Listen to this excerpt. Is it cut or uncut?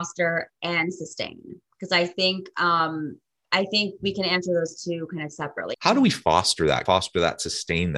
cut